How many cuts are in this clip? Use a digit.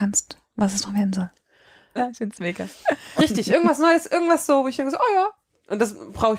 2